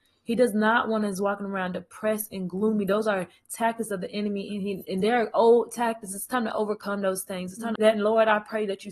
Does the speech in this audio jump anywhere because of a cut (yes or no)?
yes